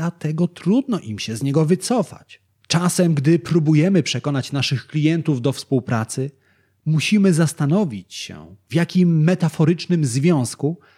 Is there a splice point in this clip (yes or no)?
no